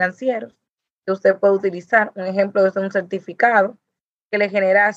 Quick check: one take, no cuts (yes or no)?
yes